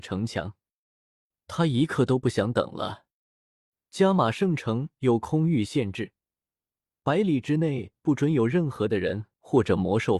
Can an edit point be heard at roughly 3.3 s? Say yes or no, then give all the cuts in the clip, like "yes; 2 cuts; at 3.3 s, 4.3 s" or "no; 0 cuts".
no; 0 cuts